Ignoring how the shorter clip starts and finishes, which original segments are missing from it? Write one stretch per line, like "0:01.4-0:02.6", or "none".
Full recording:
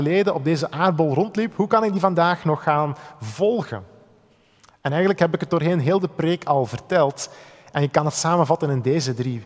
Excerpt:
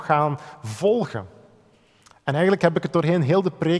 none